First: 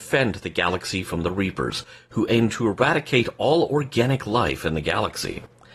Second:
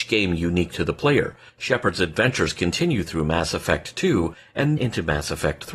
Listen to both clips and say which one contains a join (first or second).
second